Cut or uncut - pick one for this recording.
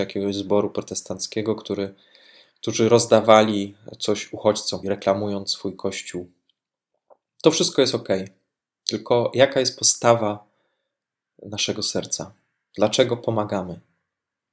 cut